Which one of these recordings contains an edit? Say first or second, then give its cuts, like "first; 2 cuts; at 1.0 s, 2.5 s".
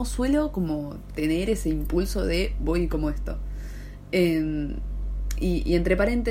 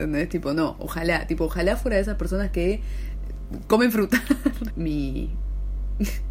second; 1 cut; at 4.7 s